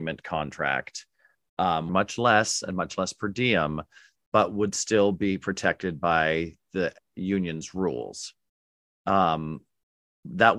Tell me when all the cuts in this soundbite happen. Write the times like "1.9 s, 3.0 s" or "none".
1.9 s